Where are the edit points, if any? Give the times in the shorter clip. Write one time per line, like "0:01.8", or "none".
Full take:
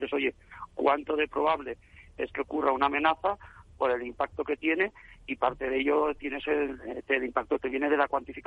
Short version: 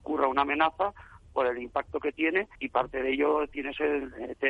0:02.6